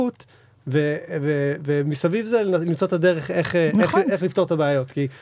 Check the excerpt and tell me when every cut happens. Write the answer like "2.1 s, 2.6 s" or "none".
none